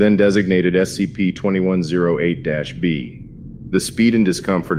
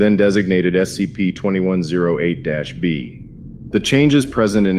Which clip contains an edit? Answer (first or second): second